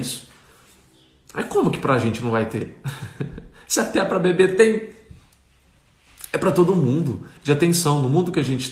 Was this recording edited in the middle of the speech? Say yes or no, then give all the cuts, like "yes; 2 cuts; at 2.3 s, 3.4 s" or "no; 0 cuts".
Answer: yes; 1 cut; at 7.4 s